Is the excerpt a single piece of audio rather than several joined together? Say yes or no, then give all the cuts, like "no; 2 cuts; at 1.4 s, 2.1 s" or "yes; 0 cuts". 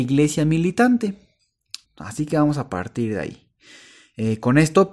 no; 1 cut; at 1.8 s